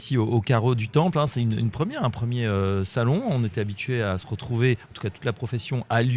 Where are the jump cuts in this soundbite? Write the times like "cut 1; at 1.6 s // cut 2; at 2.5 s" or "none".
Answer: none